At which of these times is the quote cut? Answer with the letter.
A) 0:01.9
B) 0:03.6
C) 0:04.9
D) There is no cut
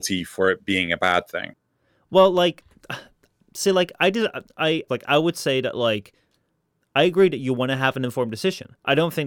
C